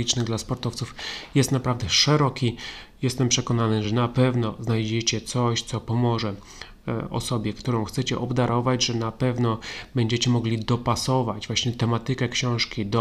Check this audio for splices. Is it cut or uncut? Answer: uncut